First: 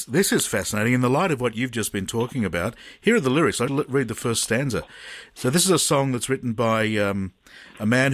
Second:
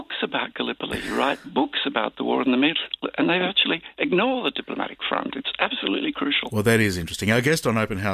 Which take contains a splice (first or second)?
first